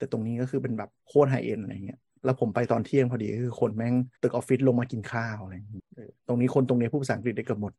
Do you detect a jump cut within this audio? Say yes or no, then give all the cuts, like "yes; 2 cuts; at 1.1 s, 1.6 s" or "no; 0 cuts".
yes; 2 cuts; at 1.0 s, 4.2 s